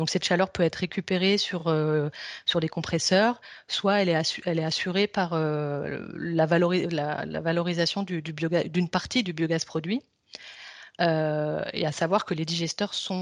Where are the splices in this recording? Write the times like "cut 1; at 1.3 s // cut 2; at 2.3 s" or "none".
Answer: none